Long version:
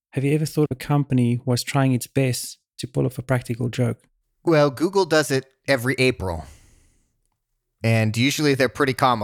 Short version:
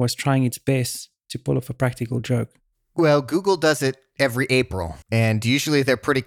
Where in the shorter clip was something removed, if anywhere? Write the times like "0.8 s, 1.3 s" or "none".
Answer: 5.0 s